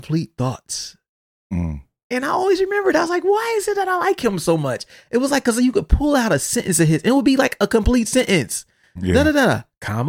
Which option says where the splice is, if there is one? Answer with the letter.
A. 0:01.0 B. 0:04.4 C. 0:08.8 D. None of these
D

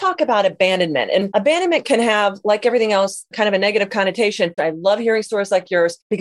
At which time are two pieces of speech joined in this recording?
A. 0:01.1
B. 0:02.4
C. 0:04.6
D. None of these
C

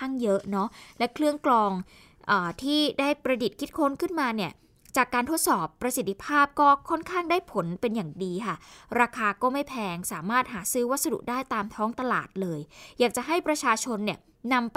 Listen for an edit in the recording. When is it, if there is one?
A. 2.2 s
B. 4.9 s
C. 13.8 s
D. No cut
D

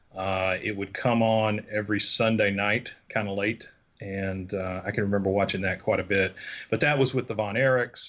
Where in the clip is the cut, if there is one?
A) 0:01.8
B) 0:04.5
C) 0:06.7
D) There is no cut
D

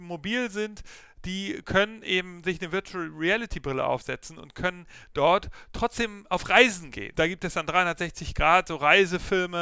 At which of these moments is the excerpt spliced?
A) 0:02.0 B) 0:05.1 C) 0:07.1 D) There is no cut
C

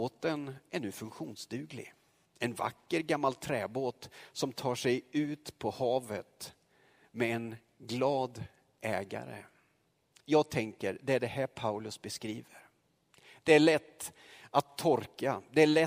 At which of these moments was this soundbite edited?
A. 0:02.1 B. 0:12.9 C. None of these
C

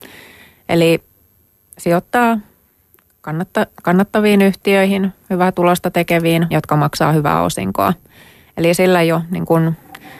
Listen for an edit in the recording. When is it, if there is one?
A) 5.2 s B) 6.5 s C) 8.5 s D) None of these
B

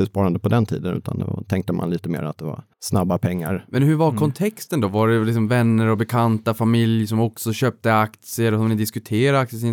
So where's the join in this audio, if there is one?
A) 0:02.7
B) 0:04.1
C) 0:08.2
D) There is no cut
A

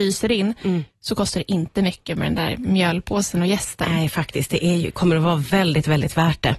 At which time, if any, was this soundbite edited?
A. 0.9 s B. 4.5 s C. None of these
C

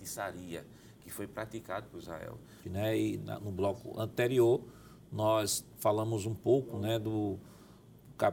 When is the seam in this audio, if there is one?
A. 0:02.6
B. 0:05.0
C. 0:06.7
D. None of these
A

